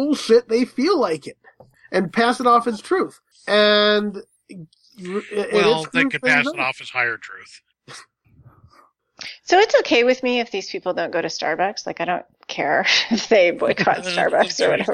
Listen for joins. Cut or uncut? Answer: uncut